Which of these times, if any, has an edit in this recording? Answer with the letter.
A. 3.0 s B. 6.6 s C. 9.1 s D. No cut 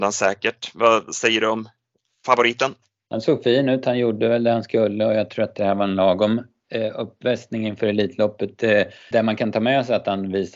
C